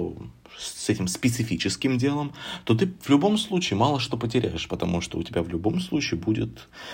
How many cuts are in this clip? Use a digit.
0